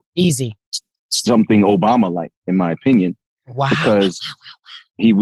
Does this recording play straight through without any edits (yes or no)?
yes